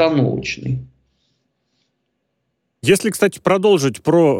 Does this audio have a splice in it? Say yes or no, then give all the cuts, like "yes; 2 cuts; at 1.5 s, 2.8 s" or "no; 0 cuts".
no; 0 cuts